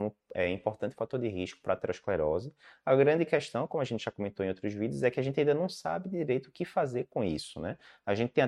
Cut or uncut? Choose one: uncut